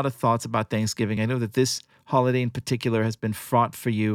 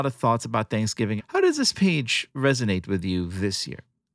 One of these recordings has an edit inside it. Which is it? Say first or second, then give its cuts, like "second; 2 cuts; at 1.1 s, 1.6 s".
second; 1 cut; at 1.2 s